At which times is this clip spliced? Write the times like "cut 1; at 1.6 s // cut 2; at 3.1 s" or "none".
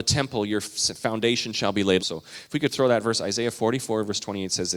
cut 1; at 2.0 s